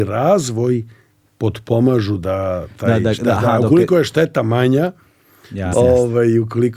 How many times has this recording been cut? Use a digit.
1